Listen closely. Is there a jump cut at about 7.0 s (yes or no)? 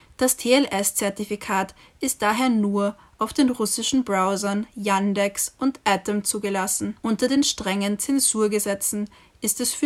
yes